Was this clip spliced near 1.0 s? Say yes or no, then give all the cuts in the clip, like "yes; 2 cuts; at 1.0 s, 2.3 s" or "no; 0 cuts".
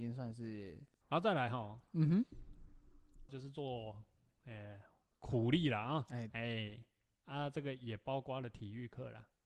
yes; 3 cuts; at 1.0 s, 3.3 s, 6.3 s